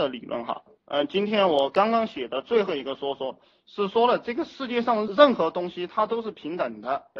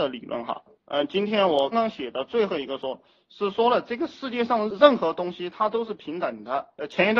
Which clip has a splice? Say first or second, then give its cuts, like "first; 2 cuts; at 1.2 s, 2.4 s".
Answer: second; 2 cuts; at 1.7 s, 2.8 s